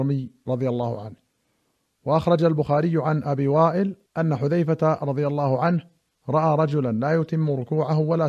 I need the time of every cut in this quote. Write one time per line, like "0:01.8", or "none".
0:04.1